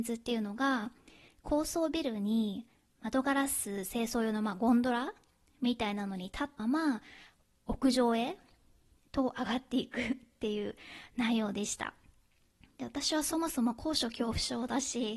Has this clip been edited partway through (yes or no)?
yes